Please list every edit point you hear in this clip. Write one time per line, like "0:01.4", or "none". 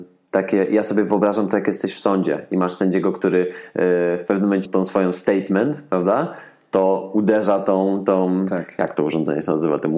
0:04.7